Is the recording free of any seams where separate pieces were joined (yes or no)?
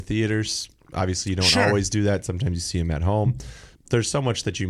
no